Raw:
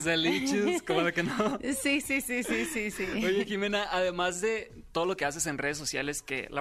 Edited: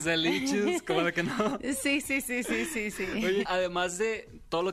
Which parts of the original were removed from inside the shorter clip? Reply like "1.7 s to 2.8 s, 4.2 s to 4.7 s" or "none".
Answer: 3.5 s to 3.9 s